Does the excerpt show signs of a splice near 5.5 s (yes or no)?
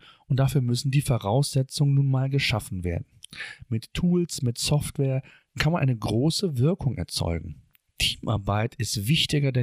yes